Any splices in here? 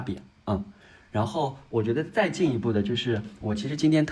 no; 0 cuts

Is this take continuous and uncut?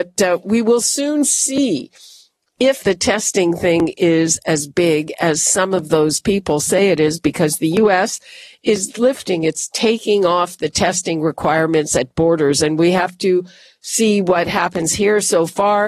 no; 1 cut; at 2.8 s

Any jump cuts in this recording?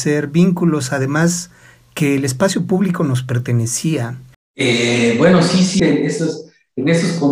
yes; 2 cuts; at 4.3 s, 5.8 s

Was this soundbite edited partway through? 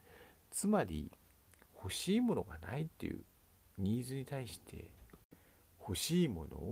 no; 0 cuts

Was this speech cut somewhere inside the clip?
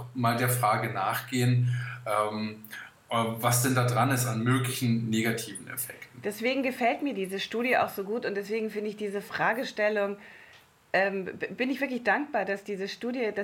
no; 0 cuts

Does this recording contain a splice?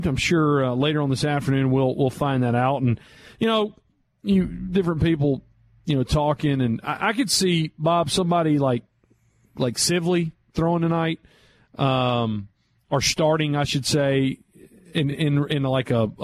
no; 0 cuts

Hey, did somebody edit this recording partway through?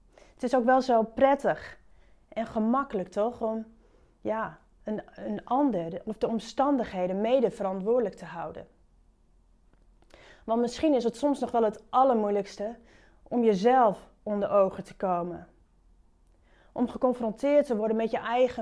no; 0 cuts

